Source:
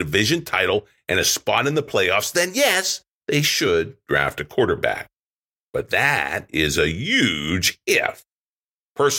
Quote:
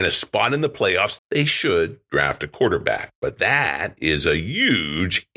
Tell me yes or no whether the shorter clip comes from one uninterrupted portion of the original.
no